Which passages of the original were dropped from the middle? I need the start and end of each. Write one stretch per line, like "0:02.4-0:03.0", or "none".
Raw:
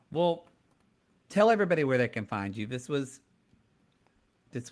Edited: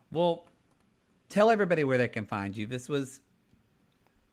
none